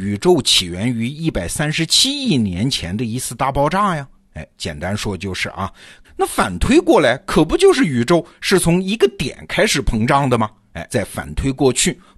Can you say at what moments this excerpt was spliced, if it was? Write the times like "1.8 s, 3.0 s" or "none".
6.0 s, 10.9 s